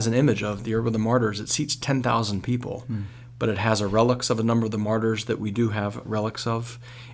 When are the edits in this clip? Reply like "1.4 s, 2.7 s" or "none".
6.1 s